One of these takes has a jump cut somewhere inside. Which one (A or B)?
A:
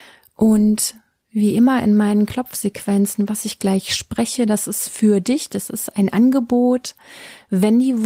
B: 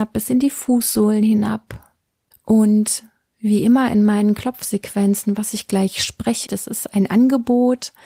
B